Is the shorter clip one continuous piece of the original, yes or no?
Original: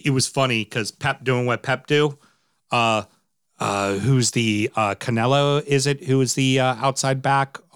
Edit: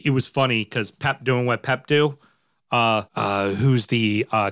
no